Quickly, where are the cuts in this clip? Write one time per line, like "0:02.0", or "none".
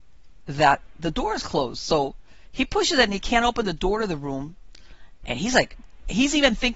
none